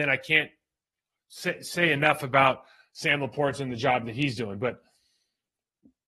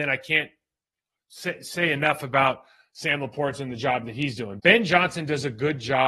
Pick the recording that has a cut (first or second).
second